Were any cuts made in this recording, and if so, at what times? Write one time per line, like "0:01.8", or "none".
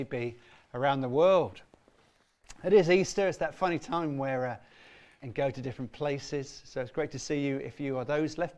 0:05.2